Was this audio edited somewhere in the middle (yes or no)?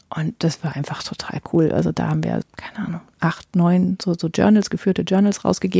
yes